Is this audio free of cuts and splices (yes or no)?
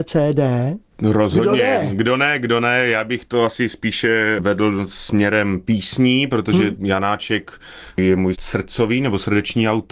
yes